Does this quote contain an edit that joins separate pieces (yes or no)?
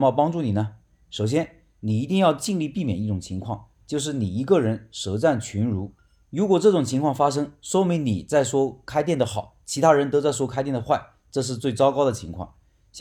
no